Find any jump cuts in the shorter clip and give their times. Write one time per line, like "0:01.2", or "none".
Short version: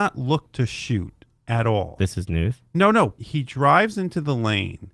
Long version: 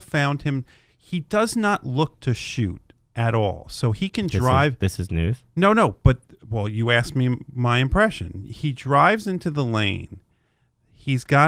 0:02.0
0:03.2